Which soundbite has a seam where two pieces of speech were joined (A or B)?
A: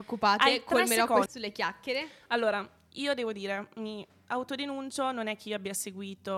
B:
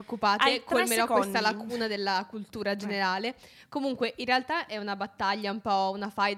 A